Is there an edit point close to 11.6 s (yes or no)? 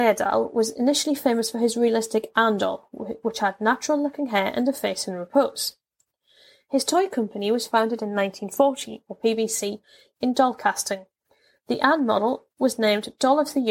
no